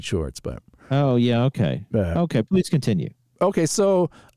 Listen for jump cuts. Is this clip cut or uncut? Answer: uncut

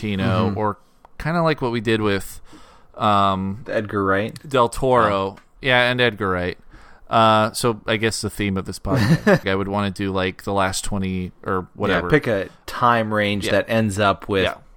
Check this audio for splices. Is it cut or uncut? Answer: cut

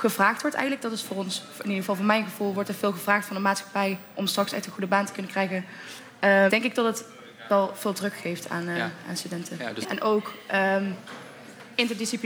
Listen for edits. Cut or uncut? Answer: cut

